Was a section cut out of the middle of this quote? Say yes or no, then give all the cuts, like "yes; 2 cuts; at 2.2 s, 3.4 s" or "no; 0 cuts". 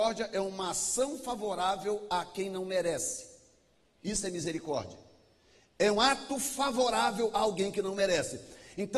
yes; 1 cut; at 5.9 s